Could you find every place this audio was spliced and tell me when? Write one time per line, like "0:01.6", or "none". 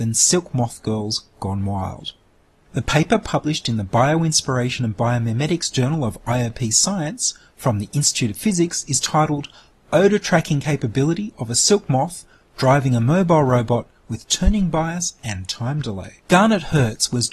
0:16.2